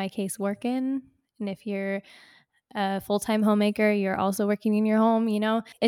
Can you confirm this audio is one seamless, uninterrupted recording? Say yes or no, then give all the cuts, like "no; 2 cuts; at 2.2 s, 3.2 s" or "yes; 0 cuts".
yes; 0 cuts